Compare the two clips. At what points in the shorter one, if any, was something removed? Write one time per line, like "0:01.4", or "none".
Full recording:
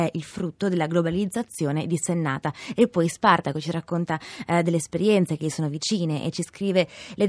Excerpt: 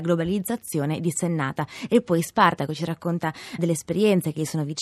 0:03.6